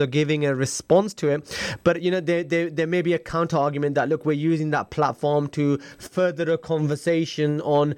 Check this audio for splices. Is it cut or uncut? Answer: uncut